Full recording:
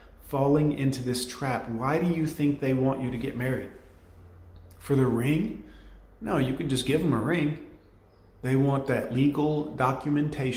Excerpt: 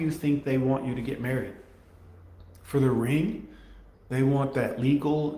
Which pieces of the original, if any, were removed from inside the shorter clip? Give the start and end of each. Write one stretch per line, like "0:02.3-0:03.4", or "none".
0:06.1-0:08.3